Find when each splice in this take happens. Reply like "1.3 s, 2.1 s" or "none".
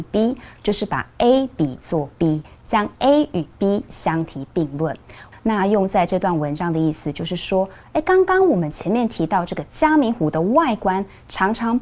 5.3 s